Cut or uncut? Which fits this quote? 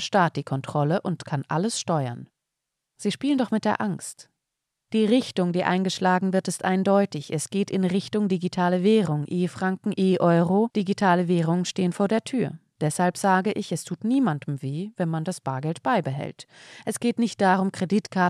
uncut